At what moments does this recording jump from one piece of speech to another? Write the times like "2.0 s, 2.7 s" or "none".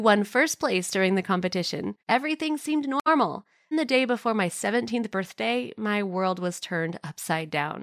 2.0 s, 3.7 s